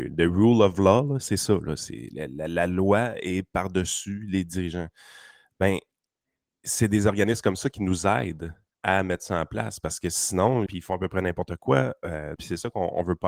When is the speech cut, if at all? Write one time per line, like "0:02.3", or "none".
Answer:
0:10.7
0:12.4